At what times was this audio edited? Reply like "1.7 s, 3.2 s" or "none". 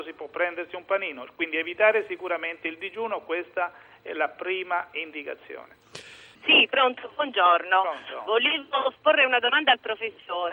6.4 s